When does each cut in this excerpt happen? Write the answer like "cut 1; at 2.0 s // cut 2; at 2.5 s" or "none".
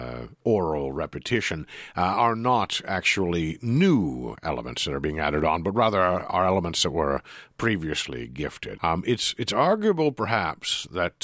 cut 1; at 8.8 s